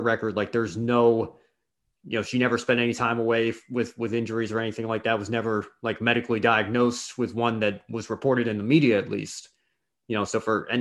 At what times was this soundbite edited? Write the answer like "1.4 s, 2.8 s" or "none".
none